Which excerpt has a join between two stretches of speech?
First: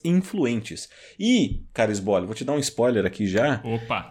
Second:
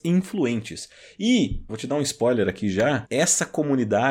second; 2 cuts; at 1.7 s, 3.0 s

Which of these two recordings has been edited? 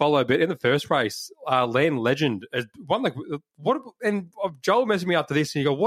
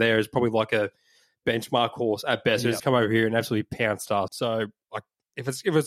second; 2 cuts; at 2.8 s, 4.3 s

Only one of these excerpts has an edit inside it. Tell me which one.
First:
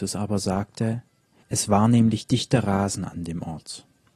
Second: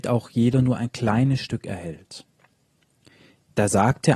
first; 1 cut; at 1.4 s

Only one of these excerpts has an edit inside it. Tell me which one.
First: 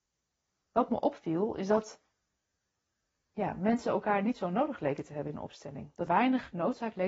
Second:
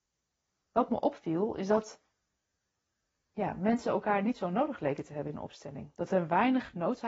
first; 1 cut; at 6.1 s

